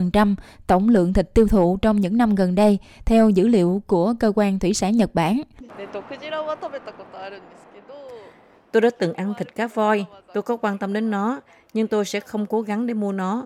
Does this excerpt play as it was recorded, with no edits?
yes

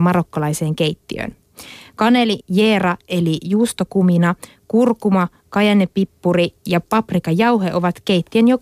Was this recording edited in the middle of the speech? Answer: yes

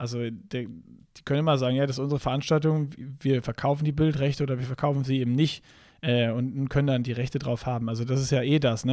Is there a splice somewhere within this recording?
no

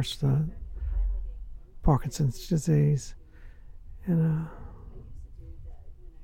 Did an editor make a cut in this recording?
no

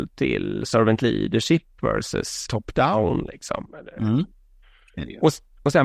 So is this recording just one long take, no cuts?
no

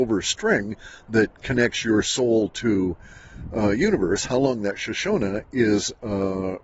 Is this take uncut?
yes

